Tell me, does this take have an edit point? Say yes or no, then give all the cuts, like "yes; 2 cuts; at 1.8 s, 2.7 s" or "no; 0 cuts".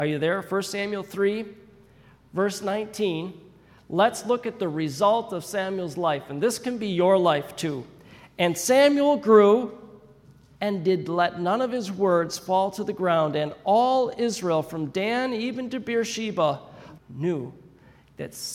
yes; 2 cuts; at 10.6 s, 17.0 s